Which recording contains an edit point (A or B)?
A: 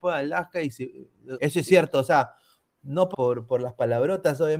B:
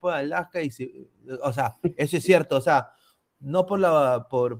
A